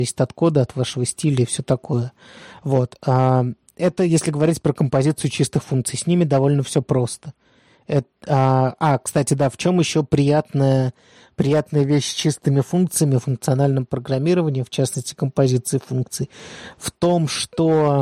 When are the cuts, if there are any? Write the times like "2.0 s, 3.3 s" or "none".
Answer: none